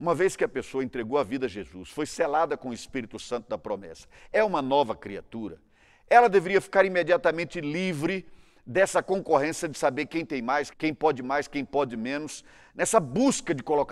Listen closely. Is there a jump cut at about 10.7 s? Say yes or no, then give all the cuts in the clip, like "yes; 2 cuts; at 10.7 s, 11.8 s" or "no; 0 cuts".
yes; 1 cut; at 10.7 s